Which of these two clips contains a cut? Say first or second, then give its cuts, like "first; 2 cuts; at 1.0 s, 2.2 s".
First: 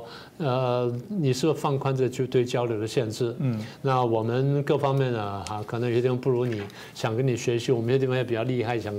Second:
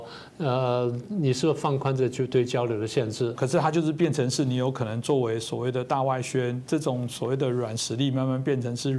second; 1 cut; at 3.3 s